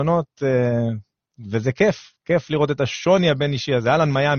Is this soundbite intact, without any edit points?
yes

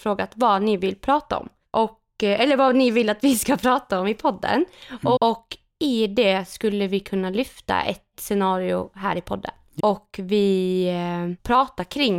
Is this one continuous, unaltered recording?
no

